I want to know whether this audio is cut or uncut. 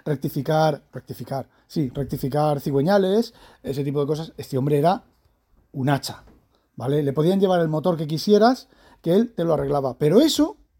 uncut